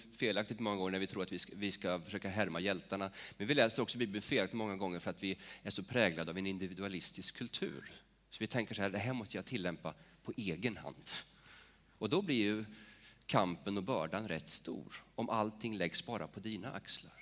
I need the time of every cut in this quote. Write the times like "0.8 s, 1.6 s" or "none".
none